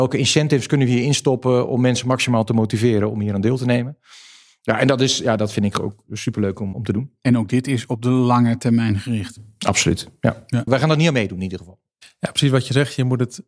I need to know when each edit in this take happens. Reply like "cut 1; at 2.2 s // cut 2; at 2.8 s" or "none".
cut 1; at 6.7 s // cut 2; at 10.7 s